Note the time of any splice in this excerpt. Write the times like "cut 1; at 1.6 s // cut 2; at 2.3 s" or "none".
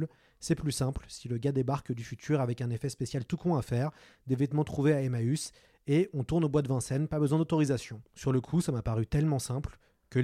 cut 1; at 8.1 s